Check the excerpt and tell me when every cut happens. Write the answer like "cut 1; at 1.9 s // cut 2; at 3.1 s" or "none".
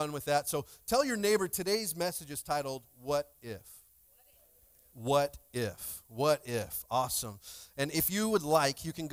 none